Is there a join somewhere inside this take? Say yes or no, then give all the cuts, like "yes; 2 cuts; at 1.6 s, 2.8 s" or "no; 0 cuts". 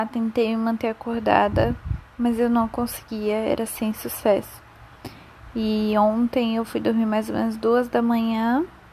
no; 0 cuts